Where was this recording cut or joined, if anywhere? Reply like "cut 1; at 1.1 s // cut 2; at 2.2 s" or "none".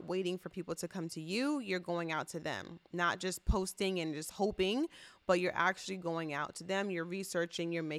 none